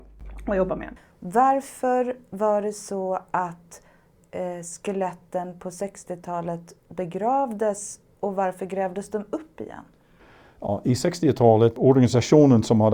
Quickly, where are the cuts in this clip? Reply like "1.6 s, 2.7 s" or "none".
none